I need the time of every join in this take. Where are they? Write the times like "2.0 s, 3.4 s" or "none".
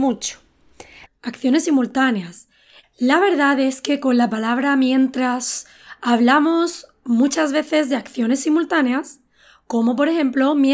1.1 s, 2.8 s